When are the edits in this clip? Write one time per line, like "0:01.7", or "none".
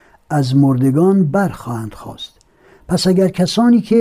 none